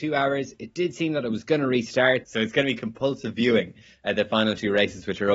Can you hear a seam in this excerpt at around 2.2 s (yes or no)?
yes